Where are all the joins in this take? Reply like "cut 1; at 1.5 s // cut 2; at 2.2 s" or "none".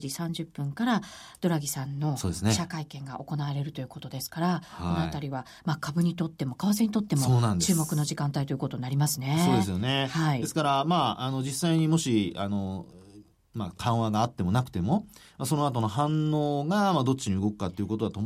none